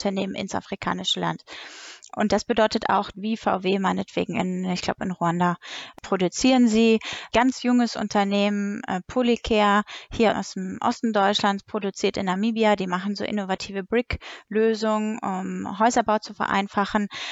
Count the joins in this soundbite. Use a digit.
1